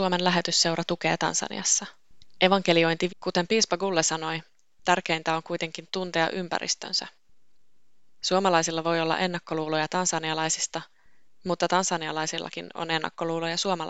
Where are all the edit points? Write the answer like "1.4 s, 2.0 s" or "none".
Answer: 3.1 s